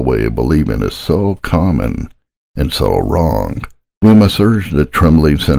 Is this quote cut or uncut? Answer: uncut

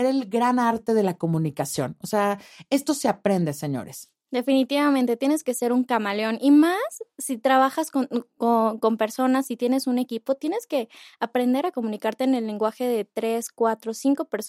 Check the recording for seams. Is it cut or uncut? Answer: uncut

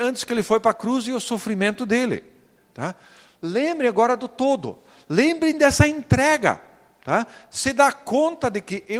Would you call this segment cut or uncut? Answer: uncut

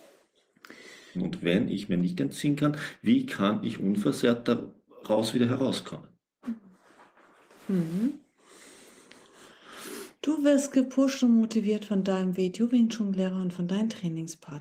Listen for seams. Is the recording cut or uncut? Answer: cut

